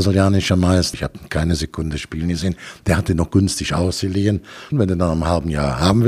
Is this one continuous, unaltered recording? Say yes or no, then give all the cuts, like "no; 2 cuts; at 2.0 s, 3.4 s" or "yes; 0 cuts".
no; 2 cuts; at 0.9 s, 4.7 s